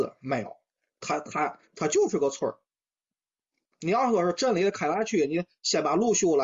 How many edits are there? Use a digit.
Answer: 0